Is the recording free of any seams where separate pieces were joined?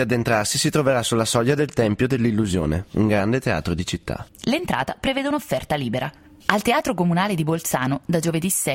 no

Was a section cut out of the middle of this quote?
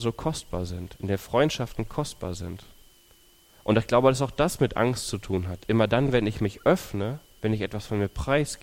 no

